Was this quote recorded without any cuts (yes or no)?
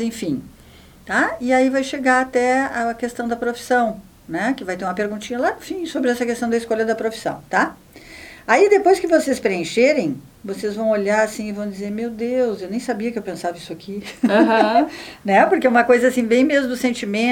yes